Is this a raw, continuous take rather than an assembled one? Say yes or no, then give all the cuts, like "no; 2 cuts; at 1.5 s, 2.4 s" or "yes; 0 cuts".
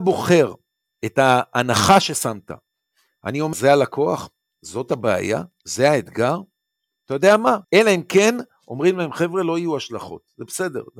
no; 2 cuts; at 3.5 s, 7.6 s